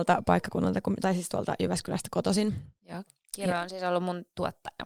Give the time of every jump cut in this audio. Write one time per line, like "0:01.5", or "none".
none